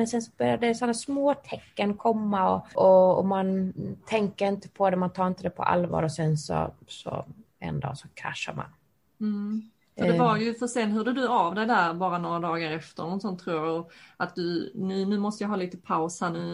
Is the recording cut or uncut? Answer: uncut